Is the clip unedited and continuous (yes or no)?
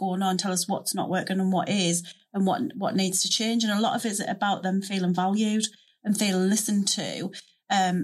yes